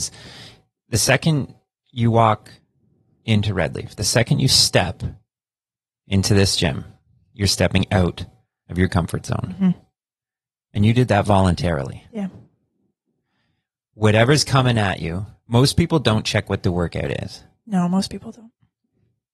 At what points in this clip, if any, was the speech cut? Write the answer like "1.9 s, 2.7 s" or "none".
none